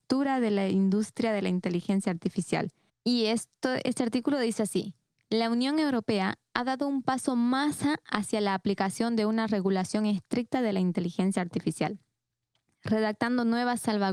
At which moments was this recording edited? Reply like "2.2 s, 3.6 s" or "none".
2.9 s